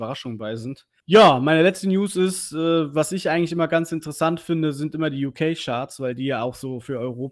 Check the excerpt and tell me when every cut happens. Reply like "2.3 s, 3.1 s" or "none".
1.0 s

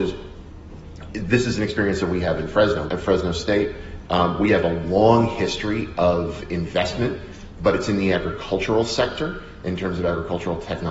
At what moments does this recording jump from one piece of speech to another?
2.9 s

